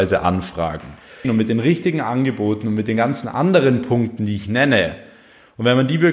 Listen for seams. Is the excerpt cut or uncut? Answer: cut